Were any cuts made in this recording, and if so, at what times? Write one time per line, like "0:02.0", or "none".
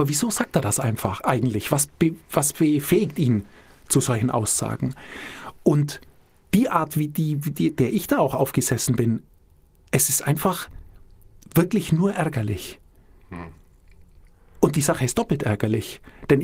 none

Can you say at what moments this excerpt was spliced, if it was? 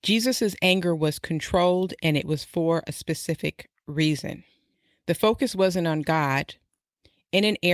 none

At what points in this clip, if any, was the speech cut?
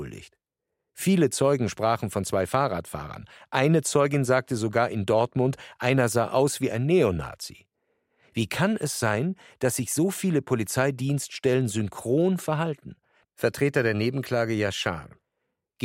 0:13.2

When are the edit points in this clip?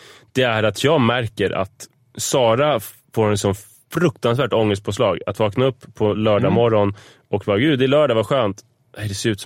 none

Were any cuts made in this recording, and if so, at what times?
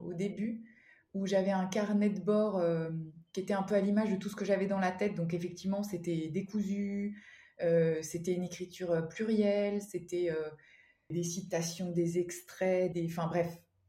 0:11.1
0:12.9

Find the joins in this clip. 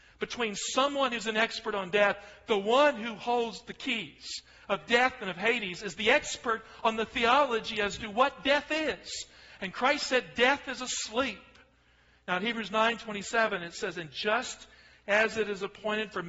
none

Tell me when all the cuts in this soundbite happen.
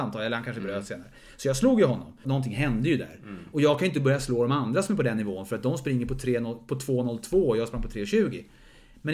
0:02.2

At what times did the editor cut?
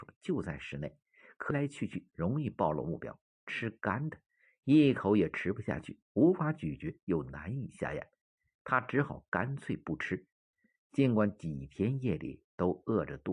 0:01.5

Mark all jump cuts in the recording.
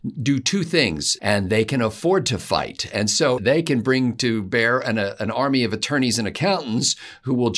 0:01.2
0:03.4

